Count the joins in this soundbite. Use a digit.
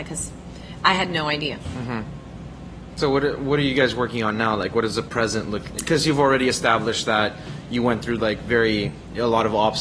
1